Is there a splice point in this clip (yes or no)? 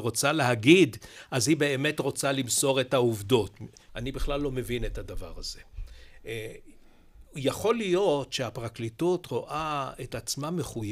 yes